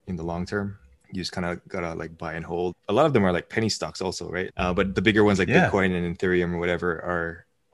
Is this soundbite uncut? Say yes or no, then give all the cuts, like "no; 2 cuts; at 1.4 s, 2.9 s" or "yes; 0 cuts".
no; 2 cuts; at 2.7 s, 4.5 s